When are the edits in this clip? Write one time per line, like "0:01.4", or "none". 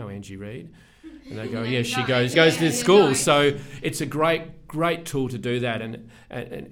0:02.3